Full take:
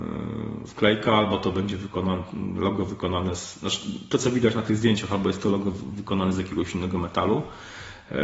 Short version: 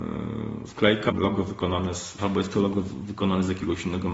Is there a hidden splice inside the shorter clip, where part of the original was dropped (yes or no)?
yes